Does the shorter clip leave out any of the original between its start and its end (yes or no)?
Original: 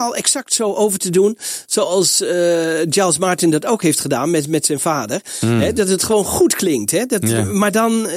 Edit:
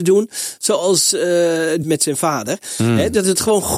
yes